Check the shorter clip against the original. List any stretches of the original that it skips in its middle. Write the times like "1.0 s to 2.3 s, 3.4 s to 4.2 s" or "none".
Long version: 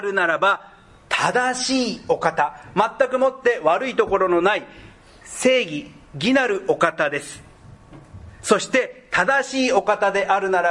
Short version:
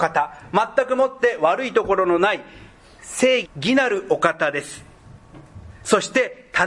5.7 s to 6.0 s